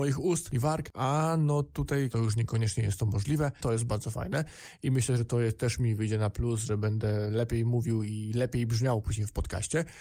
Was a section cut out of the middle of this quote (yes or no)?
yes